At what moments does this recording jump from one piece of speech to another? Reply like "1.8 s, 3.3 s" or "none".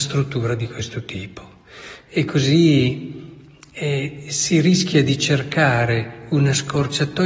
2.0 s